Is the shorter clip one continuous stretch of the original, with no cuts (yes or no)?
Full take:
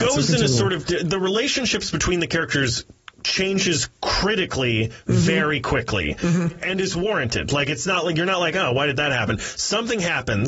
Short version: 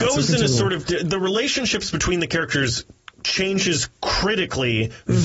yes